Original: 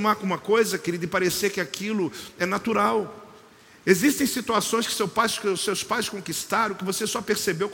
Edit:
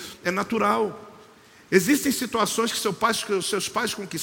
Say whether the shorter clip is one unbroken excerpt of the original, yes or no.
yes